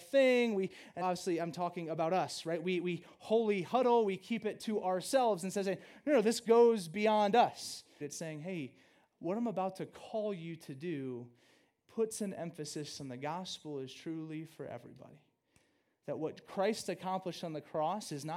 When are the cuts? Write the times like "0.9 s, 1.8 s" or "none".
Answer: 1.0 s, 8.0 s